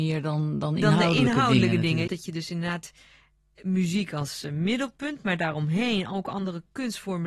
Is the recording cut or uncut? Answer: cut